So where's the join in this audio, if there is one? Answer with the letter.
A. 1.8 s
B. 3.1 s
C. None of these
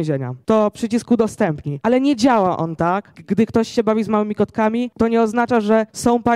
B